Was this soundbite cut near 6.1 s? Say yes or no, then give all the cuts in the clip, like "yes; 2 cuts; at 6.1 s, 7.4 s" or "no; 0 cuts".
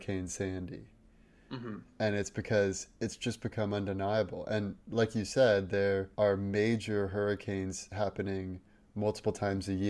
yes; 1 cut; at 6.1 s